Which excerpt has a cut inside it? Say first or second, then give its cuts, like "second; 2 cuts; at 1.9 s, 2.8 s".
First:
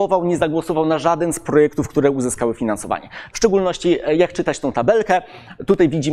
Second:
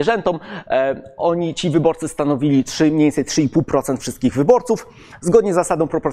first; 1 cut; at 3.3 s